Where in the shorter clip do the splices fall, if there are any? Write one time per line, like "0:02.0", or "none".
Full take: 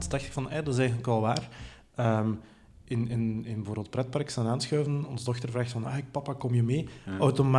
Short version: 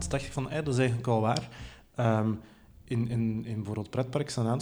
none